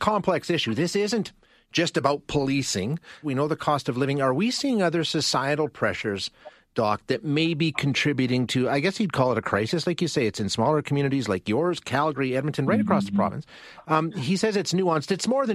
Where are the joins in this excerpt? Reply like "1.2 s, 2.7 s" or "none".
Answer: 3.2 s